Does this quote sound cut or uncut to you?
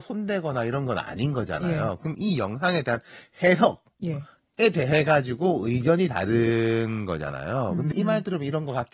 cut